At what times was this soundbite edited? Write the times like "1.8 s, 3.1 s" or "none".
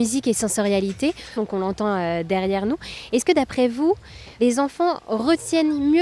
1.4 s